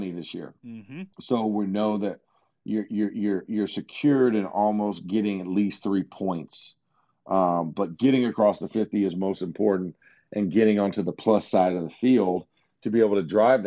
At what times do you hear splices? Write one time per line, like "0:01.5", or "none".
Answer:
0:01.1